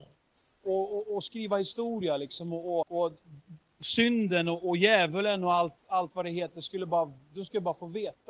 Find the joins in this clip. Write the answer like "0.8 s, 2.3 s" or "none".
2.8 s